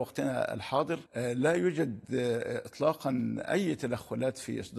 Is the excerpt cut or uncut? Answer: cut